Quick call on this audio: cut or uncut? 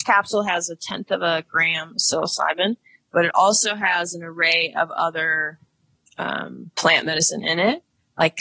uncut